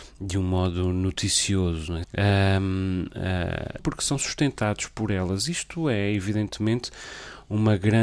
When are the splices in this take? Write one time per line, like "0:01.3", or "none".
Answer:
0:02.0
0:03.8